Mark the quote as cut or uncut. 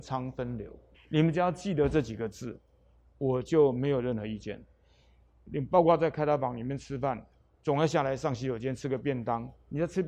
cut